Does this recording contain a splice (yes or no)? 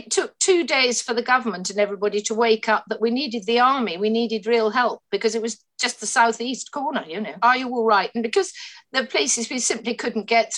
yes